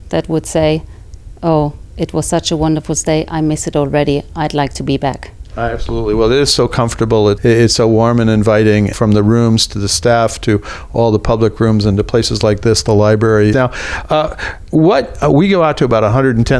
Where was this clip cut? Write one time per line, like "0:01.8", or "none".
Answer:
0:07.4
0:08.9
0:13.5